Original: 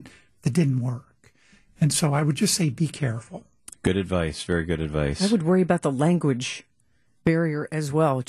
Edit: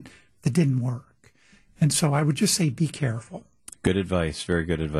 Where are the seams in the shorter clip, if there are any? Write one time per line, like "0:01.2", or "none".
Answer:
none